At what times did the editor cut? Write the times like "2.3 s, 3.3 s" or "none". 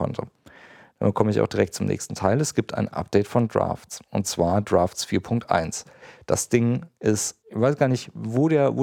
7.4 s